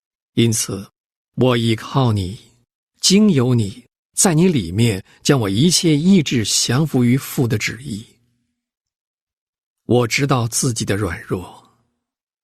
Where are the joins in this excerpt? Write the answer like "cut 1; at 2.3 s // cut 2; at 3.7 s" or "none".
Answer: cut 1; at 1.3 s